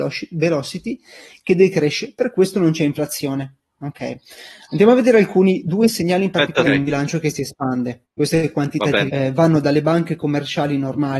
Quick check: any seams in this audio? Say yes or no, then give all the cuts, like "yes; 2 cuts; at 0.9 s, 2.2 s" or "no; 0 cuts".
yes; 2 cuts; at 6.6 s, 9.1 s